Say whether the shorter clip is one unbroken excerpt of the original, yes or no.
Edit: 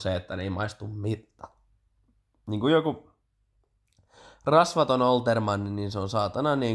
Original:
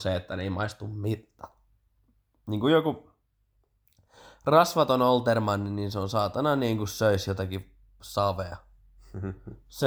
yes